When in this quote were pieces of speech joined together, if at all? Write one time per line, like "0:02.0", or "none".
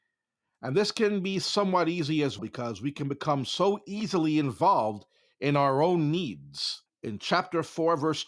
0:02.4
0:06.9